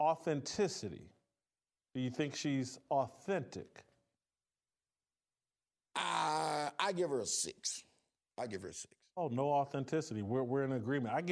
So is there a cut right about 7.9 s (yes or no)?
no